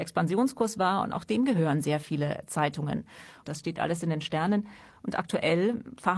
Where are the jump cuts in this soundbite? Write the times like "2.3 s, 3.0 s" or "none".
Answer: 3.4 s